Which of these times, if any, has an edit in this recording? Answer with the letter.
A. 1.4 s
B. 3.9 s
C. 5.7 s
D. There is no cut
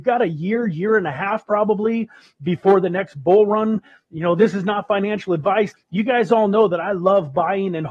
C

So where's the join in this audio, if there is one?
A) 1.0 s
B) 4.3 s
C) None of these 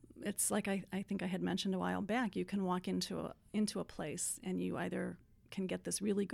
C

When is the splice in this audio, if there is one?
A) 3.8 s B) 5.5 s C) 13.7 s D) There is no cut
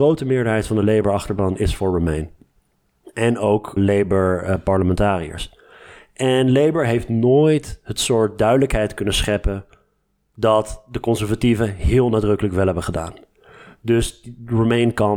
A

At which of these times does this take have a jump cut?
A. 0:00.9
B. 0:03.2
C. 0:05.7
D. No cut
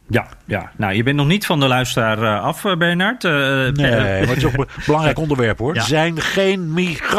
C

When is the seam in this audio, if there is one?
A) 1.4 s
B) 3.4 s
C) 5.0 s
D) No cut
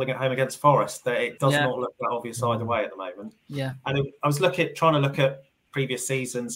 A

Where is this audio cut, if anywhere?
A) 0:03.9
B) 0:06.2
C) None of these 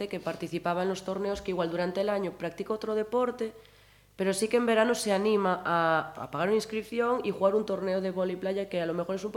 B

